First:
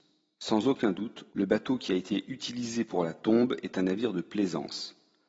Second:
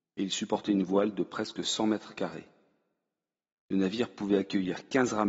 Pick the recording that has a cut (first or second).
first